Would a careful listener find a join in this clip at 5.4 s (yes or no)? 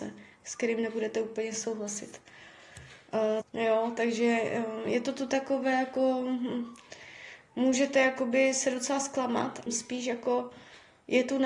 no